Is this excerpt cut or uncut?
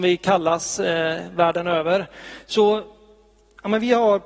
uncut